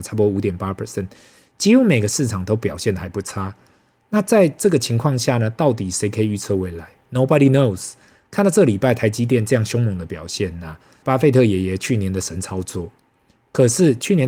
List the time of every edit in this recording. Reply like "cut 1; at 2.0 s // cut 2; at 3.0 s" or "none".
cut 1; at 11.0 s